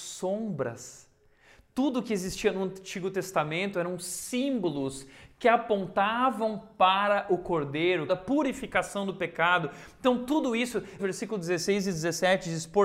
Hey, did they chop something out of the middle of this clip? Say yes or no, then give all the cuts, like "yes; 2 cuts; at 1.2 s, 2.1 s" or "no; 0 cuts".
yes; 2 cuts; at 8.1 s, 11.0 s